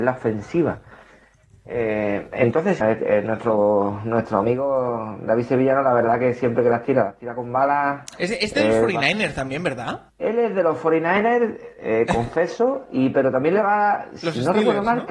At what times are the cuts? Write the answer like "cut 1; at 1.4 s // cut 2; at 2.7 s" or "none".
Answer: cut 1; at 2.8 s